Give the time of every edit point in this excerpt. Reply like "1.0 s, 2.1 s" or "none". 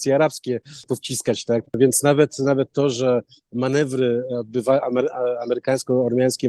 1.6 s